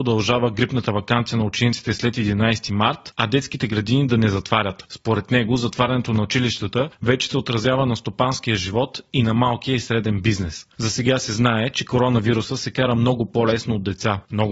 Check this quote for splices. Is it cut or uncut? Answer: uncut